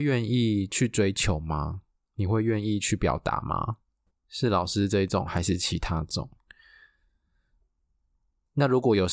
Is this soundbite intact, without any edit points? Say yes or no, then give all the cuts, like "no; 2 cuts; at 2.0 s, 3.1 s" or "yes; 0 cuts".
no; 2 cuts; at 4.1 s, 5.2 s